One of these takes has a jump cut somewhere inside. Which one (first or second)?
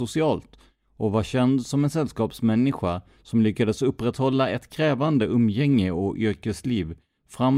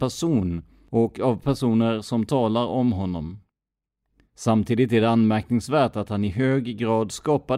second